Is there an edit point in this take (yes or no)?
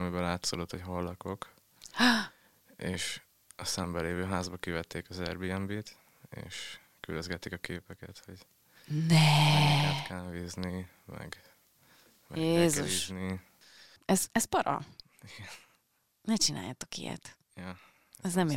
no